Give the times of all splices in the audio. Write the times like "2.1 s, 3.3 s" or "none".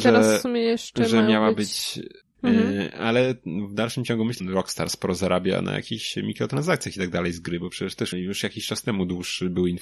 2.2 s, 4.4 s, 8.1 s